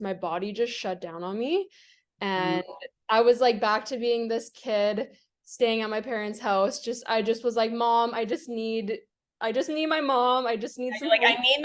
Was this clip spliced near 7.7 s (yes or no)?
no